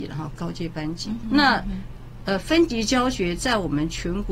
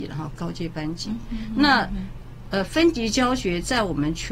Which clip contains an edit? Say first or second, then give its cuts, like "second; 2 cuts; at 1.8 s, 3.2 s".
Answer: first; 1 cut; at 1.2 s